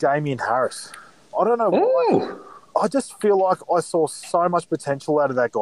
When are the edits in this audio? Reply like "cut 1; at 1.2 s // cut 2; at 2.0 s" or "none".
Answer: none